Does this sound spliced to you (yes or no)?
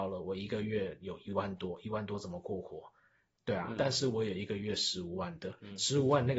no